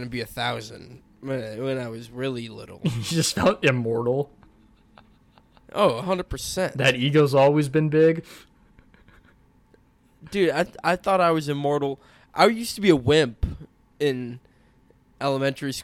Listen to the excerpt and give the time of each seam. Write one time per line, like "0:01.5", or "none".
none